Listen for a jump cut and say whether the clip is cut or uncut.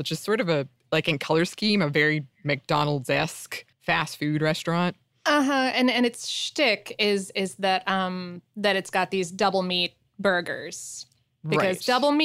cut